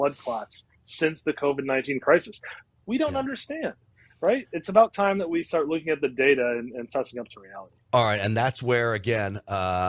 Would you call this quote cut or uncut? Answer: cut